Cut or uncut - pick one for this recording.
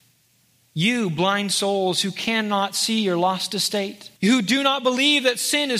cut